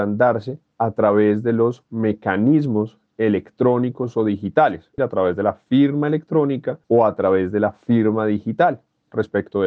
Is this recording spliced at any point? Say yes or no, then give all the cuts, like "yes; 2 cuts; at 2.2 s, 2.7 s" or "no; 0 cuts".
yes; 2 cuts; at 5.0 s, 6.8 s